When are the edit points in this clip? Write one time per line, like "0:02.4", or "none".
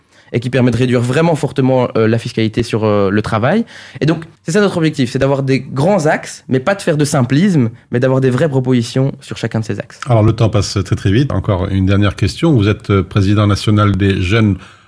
0:04.4
0:11.3